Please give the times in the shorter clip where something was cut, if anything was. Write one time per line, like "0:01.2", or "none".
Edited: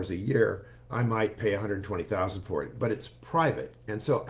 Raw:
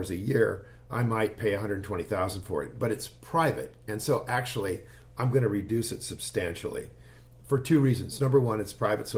none